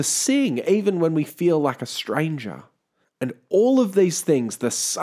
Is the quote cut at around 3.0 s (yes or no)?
yes